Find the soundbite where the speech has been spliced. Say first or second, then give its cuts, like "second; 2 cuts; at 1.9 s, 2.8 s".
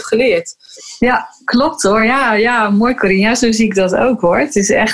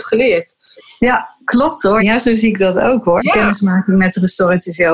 second; 2 cuts; at 2.0 s, 3.2 s